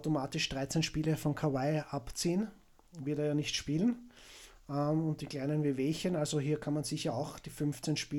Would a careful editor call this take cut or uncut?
uncut